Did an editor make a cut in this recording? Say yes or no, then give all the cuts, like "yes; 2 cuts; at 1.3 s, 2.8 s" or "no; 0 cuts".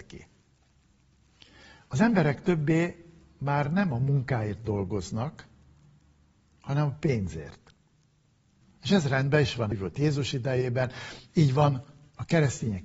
yes; 2 cuts; at 8.6 s, 9.7 s